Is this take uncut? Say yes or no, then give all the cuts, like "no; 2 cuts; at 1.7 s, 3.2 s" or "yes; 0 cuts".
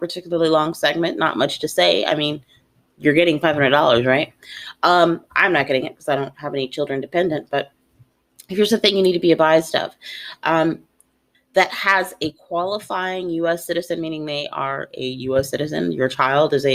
no; 1 cut; at 11.3 s